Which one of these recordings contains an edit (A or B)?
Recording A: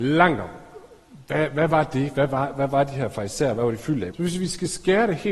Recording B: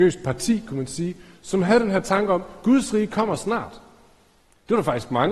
A